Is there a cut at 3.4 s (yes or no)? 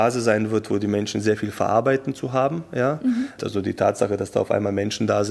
yes